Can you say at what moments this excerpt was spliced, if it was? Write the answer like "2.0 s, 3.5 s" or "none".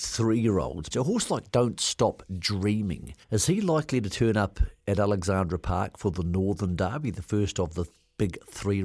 0.9 s, 3.2 s